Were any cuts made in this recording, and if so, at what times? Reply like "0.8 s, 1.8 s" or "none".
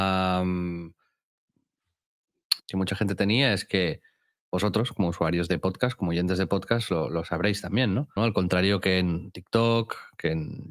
2.6 s, 8.2 s